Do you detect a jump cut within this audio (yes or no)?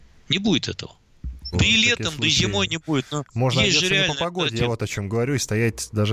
yes